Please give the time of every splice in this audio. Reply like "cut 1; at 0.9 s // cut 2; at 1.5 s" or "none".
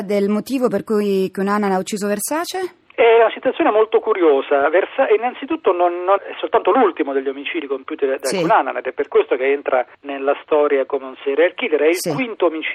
cut 1; at 6.2 s